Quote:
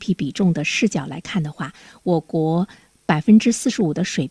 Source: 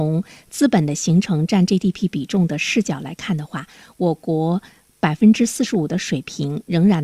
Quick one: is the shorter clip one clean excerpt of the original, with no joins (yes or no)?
yes